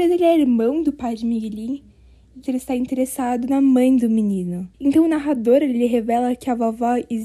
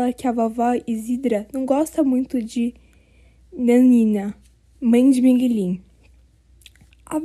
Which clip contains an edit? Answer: first; 2 cuts; at 2.4 s, 4.7 s

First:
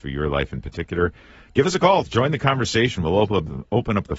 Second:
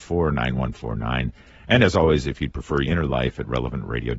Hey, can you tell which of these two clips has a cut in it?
second; 1 cut; at 2.8 s

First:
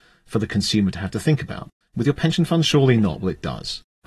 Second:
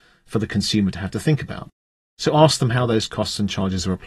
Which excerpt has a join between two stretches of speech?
first; 1 cut; at 1.8 s

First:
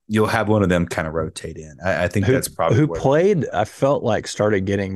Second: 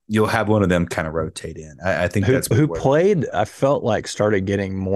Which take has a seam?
second; 1 cut; at 2.5 s

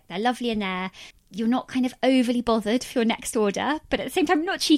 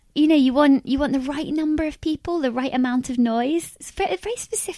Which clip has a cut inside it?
first; 1 cut; at 1.1 s

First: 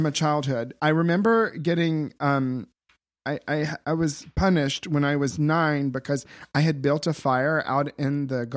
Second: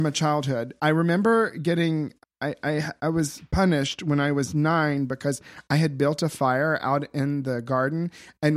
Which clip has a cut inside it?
second; 1 cut; at 2.2 s

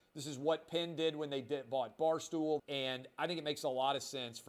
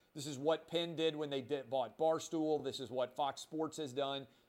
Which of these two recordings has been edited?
first; 1 cut; at 2.6 s

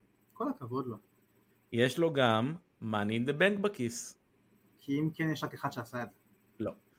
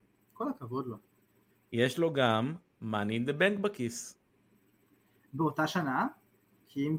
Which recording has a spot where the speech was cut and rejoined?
first; 1 cut; at 4.6 s

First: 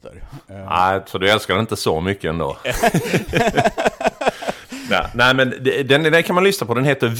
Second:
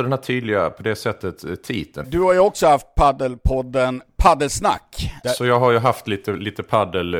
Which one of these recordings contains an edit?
second; 2 cuts; at 2.0 s, 5.2 s

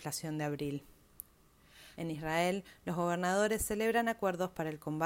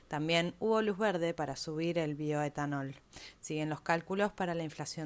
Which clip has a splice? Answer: first; 1 cut; at 1.9 s

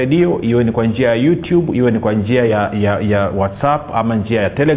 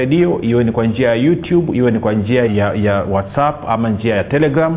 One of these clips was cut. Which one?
second; 1 cut; at 2.5 s

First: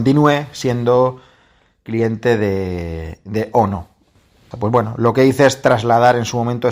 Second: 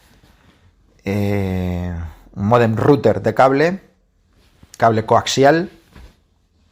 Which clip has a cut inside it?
first; 1 cut; at 4.5 s

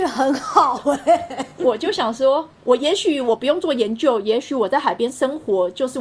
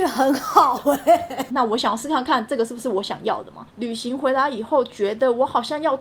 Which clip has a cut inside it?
second; 2 cuts; at 1.5 s, 3.7 s

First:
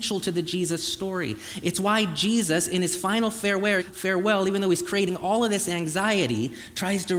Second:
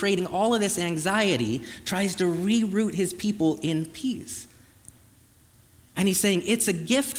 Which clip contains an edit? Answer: first; 1 cut; at 3.8 s

